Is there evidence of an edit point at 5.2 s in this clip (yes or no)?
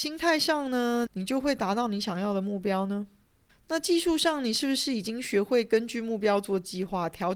no